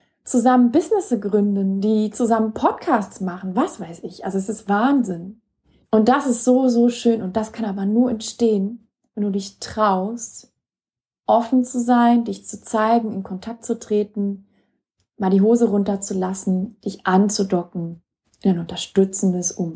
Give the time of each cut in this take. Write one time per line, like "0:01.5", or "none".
0:05.8